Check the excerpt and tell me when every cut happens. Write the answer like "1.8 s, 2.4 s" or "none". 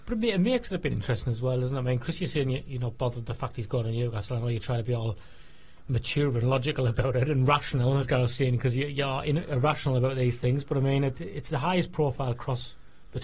none